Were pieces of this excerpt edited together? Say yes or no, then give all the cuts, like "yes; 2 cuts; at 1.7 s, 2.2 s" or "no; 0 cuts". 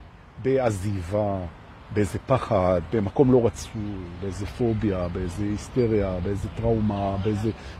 no; 0 cuts